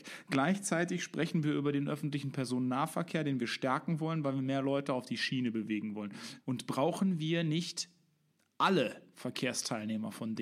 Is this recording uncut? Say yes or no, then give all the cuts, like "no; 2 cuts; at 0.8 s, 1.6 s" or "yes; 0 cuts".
no; 1 cut; at 6.4 s